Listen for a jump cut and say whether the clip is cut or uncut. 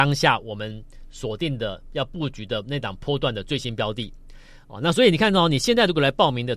uncut